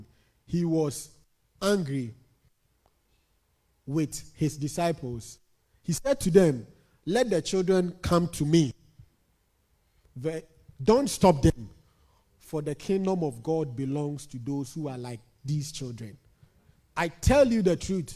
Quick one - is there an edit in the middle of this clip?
no; 0 cuts

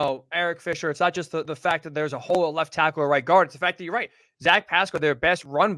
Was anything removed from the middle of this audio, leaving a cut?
no; 0 cuts

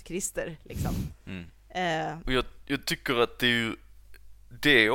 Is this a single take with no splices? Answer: no; 1 cut; at 2.3 s

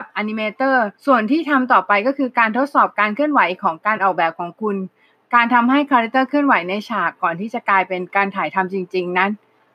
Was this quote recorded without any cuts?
no; 1 cut; at 1.0 s

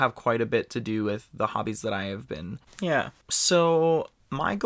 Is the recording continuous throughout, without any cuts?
no; 1 cut; at 2.7 s

